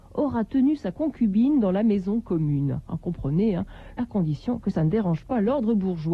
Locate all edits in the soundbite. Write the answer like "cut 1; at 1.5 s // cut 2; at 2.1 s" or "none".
cut 1; at 3.9 s

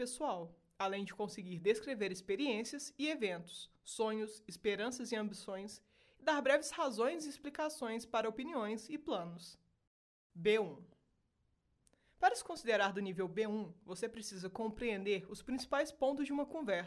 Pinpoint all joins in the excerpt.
cut 1; at 10.3 s

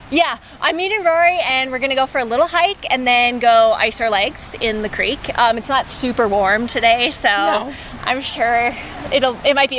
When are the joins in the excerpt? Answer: none

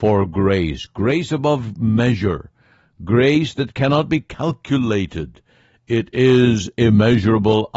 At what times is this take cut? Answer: none

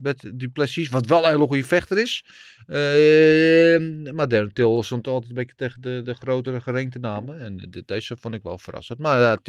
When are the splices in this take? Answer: cut 1; at 6.0 s

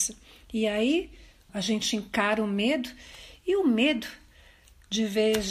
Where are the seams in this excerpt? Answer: cut 1; at 1.5 s

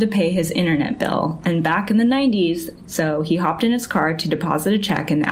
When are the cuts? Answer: cut 1; at 2.8 s

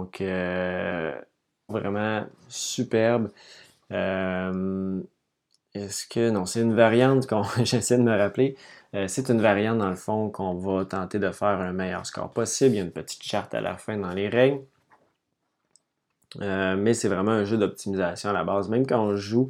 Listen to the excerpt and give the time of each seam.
cut 1; at 1.7 s

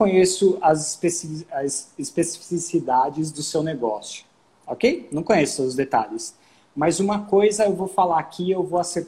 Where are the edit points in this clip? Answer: none

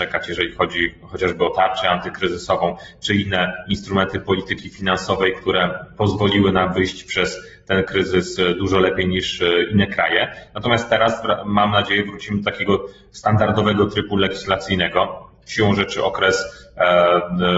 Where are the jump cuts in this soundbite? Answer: cut 1; at 15.4 s

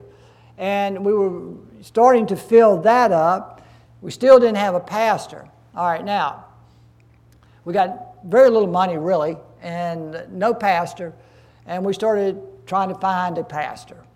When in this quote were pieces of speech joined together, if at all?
none

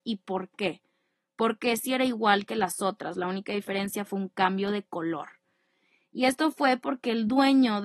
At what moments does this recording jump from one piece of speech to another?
none

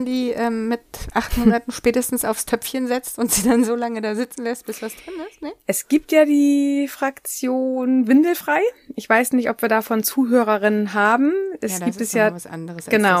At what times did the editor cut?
none

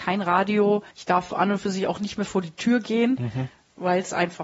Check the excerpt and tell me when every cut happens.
cut 1; at 0.9 s

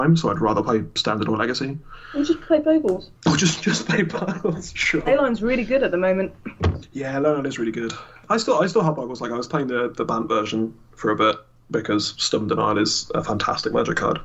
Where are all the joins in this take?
cut 1; at 3.2 s

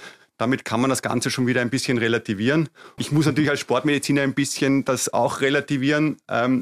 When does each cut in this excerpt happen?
cut 1; at 3.0 s

